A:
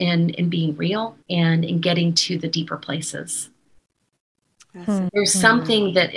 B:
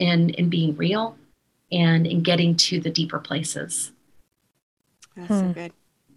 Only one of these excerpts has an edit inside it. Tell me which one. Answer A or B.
A